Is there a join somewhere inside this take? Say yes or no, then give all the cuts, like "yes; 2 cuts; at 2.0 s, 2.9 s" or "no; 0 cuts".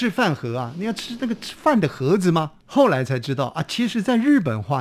yes; 1 cut; at 2.6 s